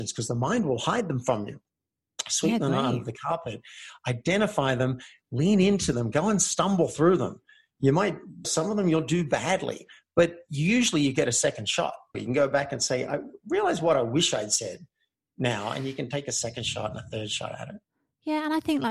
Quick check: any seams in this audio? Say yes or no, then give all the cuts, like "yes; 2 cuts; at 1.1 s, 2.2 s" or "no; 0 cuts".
yes; 2 cuts; at 8.4 s, 12.1 s